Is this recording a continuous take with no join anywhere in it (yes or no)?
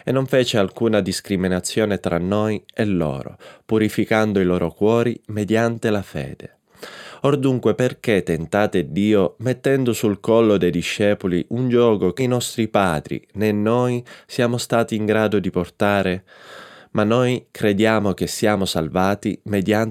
no